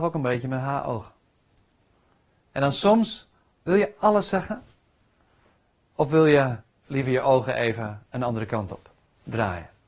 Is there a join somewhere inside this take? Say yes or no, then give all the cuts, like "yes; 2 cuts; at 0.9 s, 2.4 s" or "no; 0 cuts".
yes; 1 cut; at 3.5 s